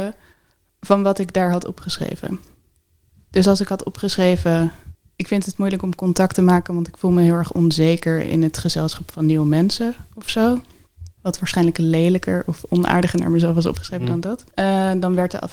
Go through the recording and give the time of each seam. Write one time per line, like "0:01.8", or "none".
0:11.1
0:14.5